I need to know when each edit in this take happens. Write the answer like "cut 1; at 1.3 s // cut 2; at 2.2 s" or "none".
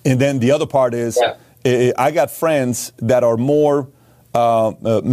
none